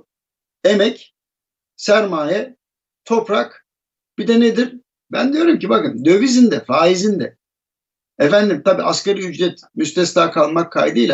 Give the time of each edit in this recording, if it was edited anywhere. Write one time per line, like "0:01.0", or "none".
0:05.0